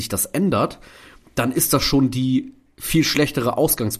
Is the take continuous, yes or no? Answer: yes